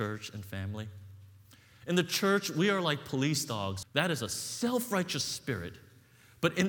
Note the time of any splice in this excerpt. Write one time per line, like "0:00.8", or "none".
0:01.8
0:03.8